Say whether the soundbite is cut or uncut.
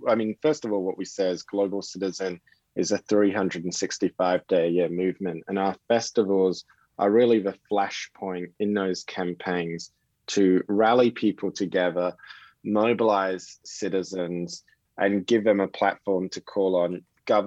uncut